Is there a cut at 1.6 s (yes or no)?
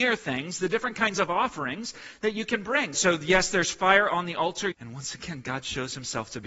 no